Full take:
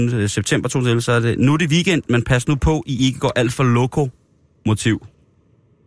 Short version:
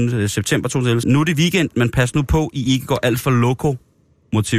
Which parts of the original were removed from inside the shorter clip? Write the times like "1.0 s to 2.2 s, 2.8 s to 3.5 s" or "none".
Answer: 1.0 s to 1.4 s